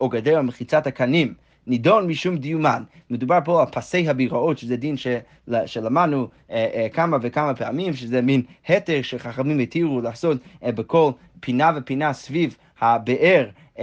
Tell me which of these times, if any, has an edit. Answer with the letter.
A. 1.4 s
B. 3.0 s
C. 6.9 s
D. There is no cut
D